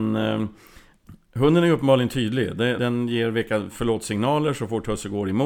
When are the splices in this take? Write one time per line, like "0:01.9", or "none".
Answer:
0:02.8